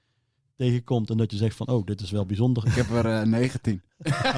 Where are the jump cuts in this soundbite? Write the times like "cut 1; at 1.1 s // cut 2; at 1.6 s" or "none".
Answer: cut 1; at 2.6 s